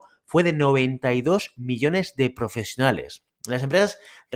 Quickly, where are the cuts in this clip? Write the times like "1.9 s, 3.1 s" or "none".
none